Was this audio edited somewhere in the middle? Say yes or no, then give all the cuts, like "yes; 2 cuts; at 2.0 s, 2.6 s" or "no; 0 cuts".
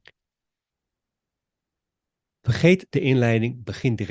no; 0 cuts